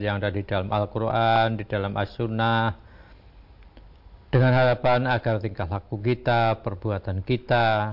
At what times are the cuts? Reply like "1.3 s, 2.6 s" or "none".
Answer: none